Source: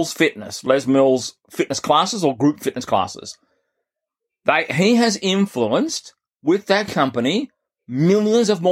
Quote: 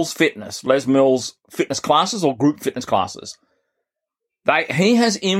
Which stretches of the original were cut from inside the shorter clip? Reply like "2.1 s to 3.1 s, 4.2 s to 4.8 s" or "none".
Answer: none

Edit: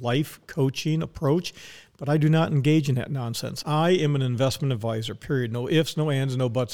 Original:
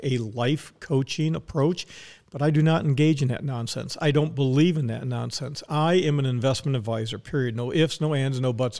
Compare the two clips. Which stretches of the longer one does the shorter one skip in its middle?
4.0 s to 5.7 s

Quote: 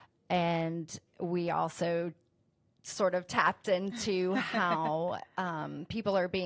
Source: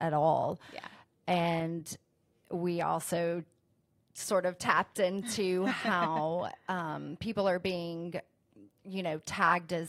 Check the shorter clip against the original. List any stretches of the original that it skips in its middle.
2.0 s to 2.4 s

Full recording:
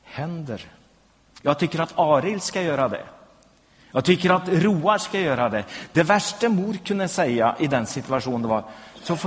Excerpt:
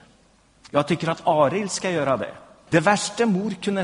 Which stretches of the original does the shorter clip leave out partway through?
3.4 s to 5.9 s

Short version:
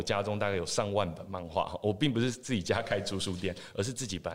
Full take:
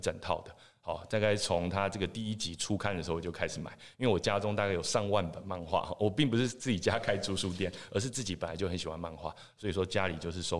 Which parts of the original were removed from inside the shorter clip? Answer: none

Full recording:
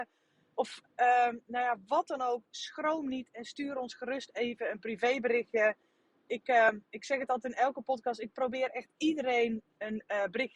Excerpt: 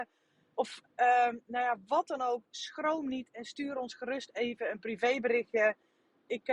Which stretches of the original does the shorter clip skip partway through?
none

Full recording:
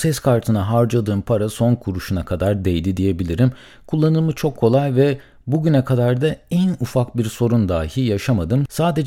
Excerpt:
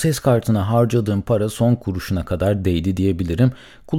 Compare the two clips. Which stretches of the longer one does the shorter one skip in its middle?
none

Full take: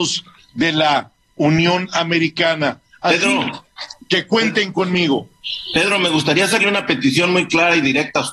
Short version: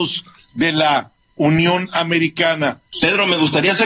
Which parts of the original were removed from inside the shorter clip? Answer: 2.9 s to 5.7 s

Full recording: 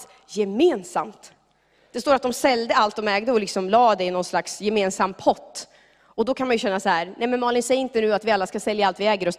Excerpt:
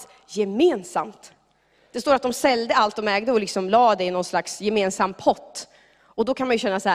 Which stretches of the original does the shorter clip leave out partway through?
none

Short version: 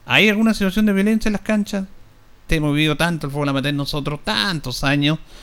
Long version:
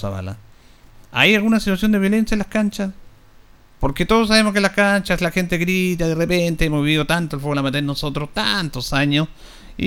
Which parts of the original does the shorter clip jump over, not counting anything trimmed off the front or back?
3.5 s to 6.6 s

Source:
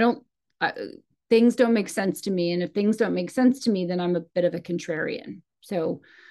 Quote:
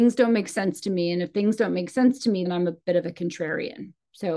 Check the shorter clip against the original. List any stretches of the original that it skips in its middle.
3.9 s to 3.9 s

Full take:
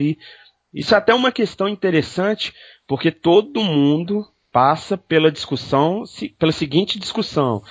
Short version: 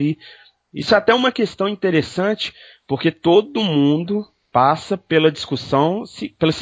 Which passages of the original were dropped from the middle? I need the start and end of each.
none

